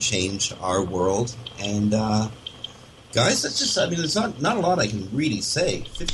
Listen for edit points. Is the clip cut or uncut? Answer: uncut